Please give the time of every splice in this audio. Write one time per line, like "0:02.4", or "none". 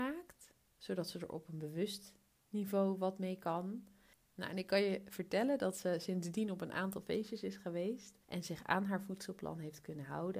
0:04.1
0:08.2

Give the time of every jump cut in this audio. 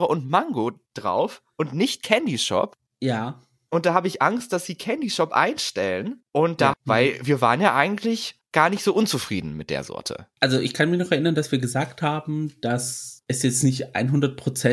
0:06.7
0:10.4

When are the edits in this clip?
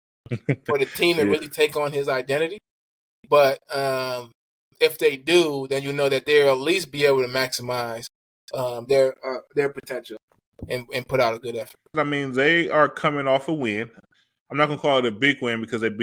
0:11.9

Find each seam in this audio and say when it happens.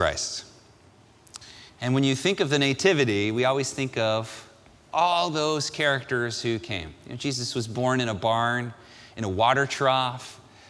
none

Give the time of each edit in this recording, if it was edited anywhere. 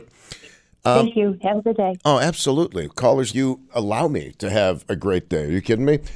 0:03.3

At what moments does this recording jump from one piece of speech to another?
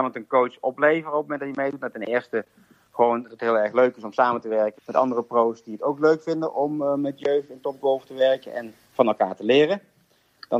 0:04.8

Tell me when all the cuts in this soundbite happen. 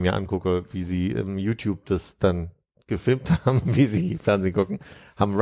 none

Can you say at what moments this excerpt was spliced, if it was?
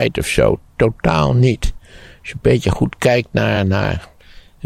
none

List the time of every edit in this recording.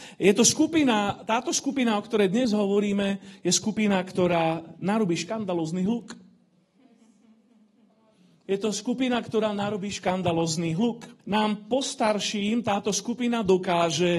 0:08.4
0:11.2

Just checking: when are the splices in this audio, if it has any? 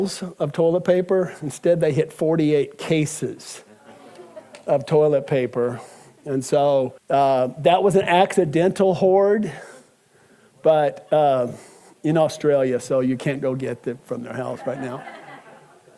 0:07.0

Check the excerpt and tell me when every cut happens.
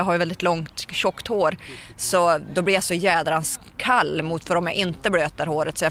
none

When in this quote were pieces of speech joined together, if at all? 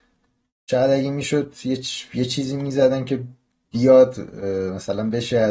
none

